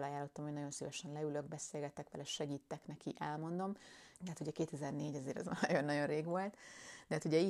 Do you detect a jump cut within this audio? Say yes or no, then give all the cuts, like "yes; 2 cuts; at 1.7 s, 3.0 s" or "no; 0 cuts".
yes; 1 cut; at 4.1 s